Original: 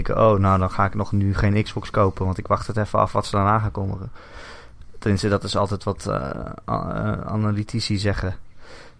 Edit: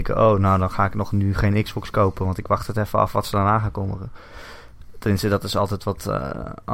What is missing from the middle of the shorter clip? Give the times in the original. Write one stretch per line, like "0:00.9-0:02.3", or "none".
none